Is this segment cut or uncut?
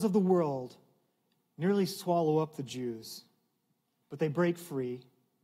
uncut